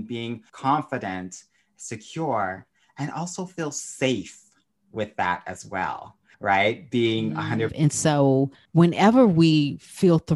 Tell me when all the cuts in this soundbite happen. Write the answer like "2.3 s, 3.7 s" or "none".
7.7 s